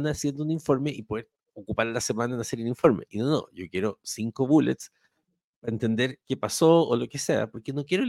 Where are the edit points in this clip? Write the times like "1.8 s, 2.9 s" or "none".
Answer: none